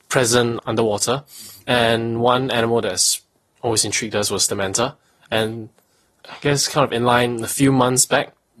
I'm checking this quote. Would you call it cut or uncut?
uncut